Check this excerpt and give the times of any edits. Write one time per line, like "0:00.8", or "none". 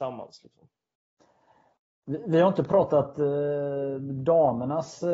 none